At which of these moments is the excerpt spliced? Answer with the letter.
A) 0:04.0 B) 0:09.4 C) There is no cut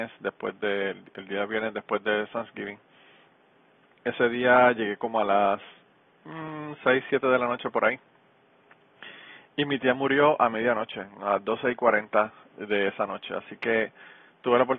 C